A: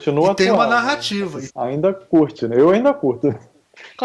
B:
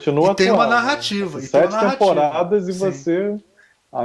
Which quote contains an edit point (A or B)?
A